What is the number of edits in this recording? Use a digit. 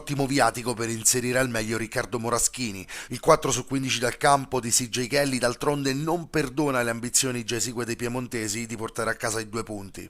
1